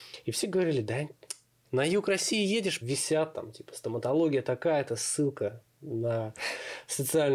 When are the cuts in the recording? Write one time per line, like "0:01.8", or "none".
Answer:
0:01.6
0:02.8